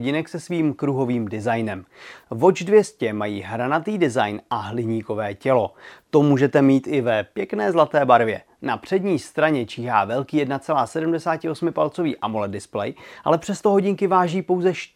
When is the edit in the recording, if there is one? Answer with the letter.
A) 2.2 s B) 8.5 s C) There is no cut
A